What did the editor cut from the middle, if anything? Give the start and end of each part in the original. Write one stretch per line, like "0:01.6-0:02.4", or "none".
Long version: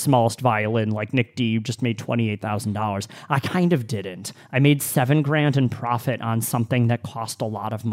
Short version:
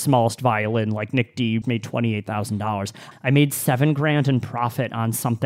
0:01.6-0:01.8
0:03.3-0:04.4